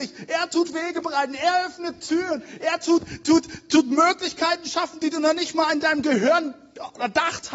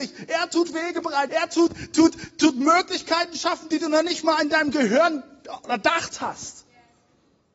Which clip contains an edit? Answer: second; 1 cut; at 1.3 s

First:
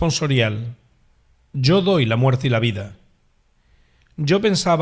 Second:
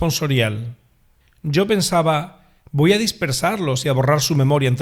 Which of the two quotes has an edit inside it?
second; 1 cut; at 1.2 s

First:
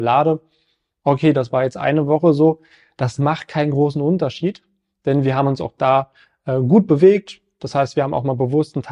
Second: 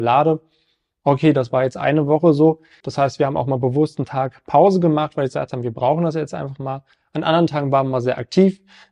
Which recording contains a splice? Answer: second; 1 cut; at 2.8 s

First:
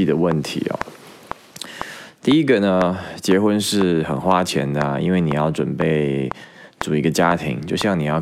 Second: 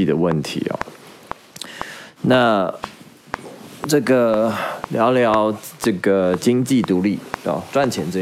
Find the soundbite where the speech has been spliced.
second; 1 cut; at 2.2 s

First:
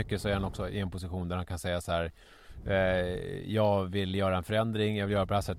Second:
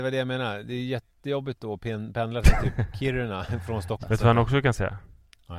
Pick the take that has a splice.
second; 1 cut; at 4.0 s

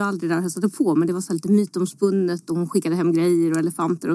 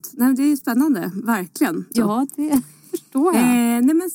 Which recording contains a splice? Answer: second; 1 cut; at 1.9 s

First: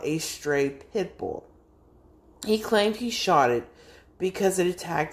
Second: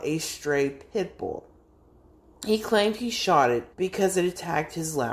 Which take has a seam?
second; 1 cut; at 3.7 s

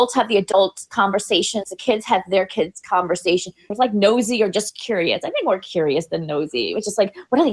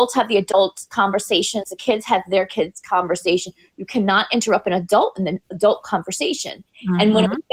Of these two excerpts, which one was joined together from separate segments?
first; 1 cut; at 3.7 s

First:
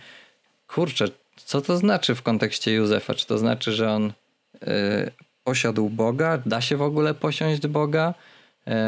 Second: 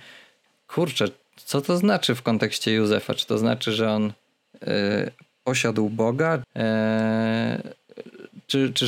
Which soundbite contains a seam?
second; 1 cut; at 6.4 s

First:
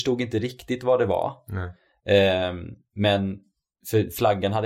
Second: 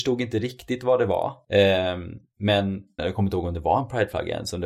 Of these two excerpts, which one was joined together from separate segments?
second; 2 cuts; at 1.4 s, 3.0 s

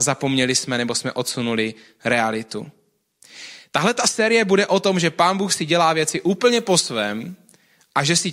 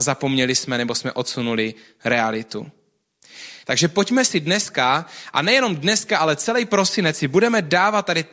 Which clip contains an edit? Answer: second; 1 cut; at 3.6 s

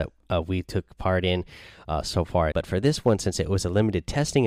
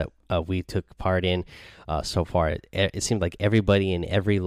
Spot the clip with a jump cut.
first; 1 cut; at 2.5 s

